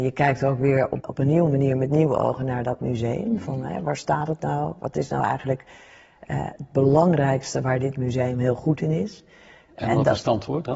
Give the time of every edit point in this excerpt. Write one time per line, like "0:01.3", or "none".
0:01.0
0:09.8